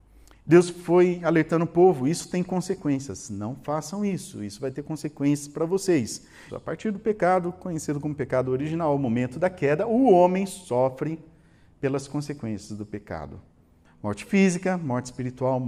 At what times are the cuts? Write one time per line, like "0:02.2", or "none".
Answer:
0:06.5
0:13.8